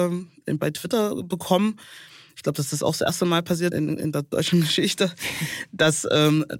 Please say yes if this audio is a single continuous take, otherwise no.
no